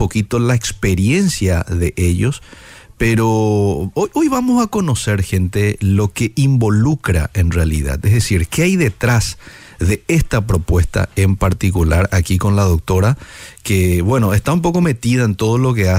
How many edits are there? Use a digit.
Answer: 0